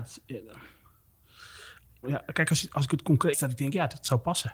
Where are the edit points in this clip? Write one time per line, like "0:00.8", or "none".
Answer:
0:02.0
0:03.3